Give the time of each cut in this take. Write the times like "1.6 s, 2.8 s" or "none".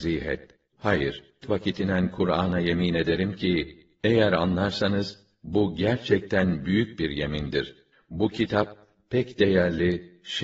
1.4 s

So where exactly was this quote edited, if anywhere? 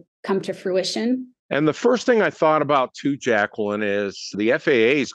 1.4 s

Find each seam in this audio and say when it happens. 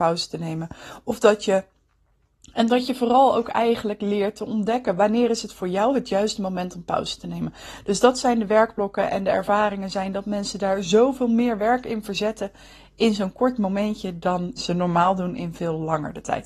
14.6 s

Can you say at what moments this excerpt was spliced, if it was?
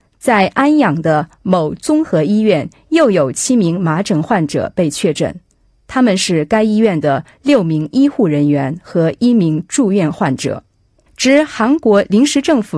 11.1 s

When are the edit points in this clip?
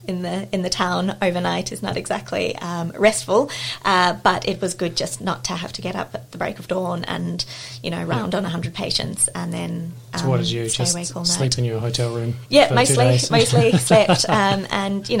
1.7 s

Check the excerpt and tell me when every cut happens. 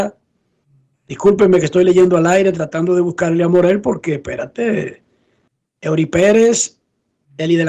0.9 s, 5.8 s

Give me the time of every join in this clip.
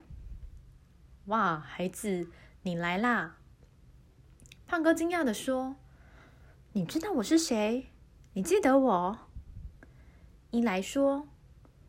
none

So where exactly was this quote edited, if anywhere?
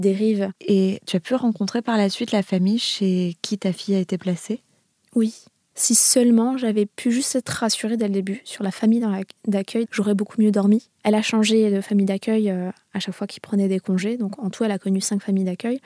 5.7 s, 9.8 s

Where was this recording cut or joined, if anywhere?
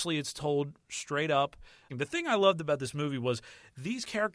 1.9 s

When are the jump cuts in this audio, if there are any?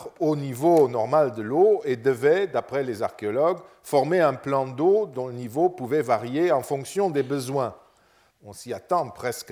8.3 s

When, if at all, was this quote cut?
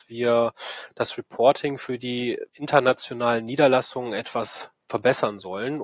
2.5 s

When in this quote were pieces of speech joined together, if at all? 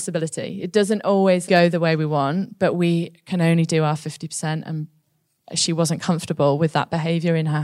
1.5 s

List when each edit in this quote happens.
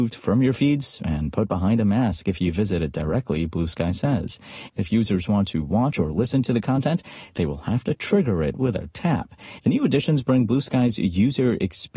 4.7 s, 9.6 s

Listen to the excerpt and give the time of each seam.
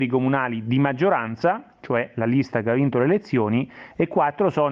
none

